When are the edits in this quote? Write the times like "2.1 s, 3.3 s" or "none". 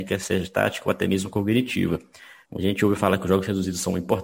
2.4 s

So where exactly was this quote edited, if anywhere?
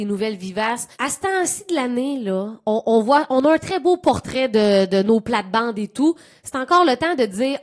0.9 s

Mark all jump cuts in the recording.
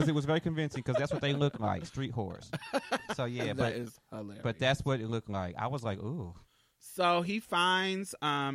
none

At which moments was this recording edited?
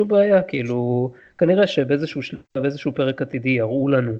none

